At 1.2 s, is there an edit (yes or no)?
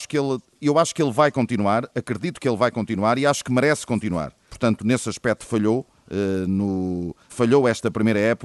no